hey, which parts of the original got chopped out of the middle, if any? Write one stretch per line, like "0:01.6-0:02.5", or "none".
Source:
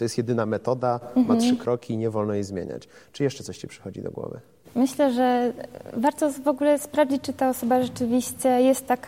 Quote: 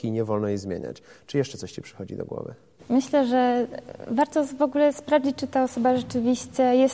none